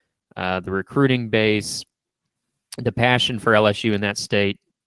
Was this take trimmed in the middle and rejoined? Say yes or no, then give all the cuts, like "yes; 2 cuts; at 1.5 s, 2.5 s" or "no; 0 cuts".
no; 0 cuts